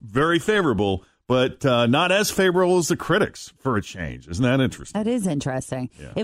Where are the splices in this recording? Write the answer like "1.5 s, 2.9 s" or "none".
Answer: none

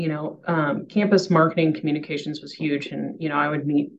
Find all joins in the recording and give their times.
none

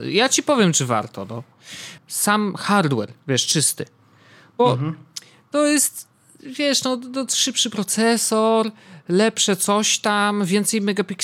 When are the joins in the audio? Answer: 2.0 s

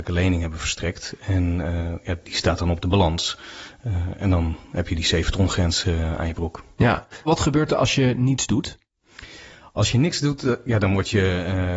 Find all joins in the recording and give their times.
7.3 s

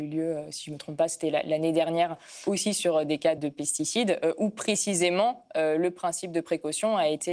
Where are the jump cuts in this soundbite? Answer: 3.4 s

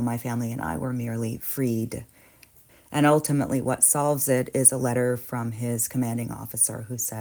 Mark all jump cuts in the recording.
2.7 s

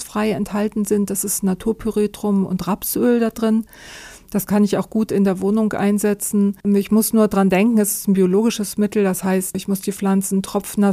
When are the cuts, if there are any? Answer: 6.6 s

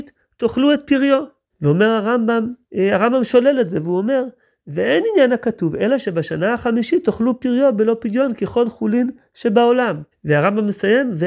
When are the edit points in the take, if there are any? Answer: 1.5 s, 2.6 s, 10.1 s

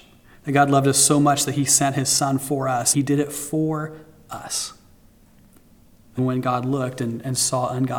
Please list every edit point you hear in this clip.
2.9 s, 6.2 s

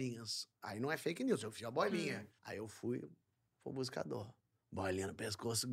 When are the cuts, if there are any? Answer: 2.4 s

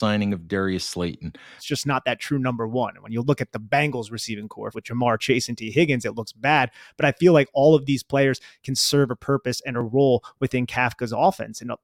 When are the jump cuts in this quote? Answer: 1.6 s, 4.7 s

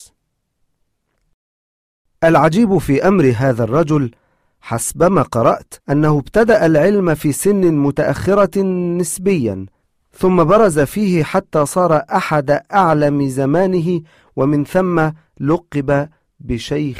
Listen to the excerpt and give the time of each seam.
5.8 s

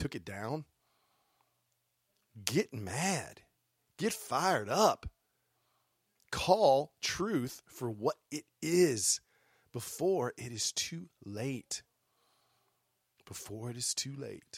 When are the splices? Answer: none

